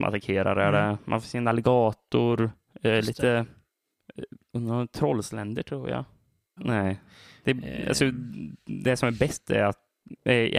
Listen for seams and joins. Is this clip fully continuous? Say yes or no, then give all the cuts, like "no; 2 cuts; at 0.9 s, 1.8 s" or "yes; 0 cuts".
no; 1 cut; at 6.6 s